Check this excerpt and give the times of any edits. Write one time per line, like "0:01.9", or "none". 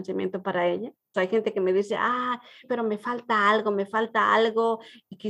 0:01.1
0:02.6